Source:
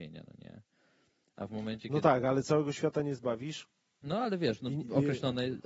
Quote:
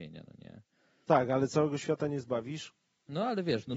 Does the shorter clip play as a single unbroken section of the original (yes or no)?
no